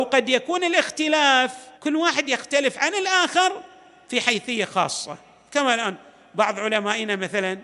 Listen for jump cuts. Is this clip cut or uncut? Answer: cut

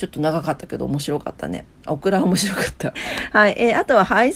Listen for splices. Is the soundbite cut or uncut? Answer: cut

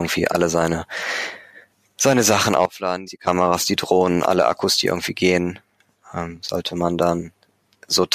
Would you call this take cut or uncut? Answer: cut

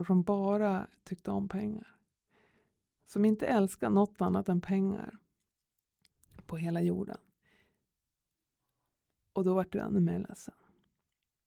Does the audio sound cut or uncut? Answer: uncut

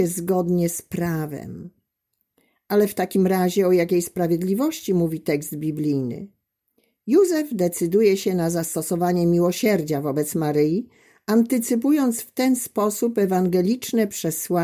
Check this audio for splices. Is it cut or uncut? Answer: uncut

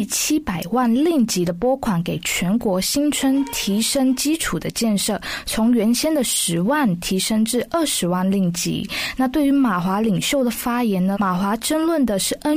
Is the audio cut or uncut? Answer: cut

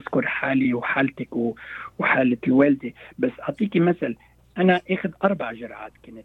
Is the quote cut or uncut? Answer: uncut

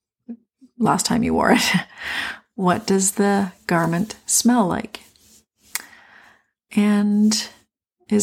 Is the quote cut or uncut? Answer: uncut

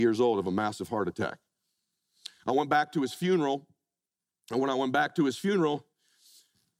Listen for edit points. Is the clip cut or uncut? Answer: uncut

